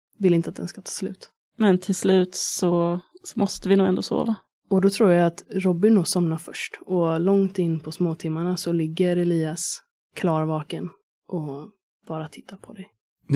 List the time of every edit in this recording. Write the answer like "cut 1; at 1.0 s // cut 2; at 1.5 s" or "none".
none